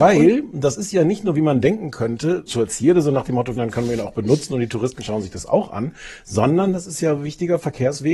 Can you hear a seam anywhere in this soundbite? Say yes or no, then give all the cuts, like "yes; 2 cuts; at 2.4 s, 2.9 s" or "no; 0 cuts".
yes; 2 cuts; at 2.5 s, 3.6 s